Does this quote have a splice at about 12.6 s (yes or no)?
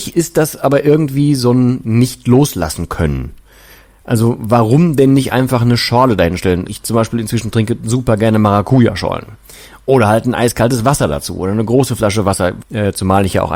yes